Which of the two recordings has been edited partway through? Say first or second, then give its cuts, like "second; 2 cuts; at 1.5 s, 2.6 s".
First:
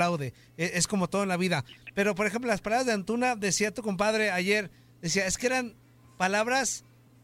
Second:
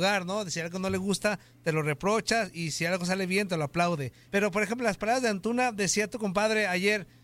second; 1 cut; at 4.3 s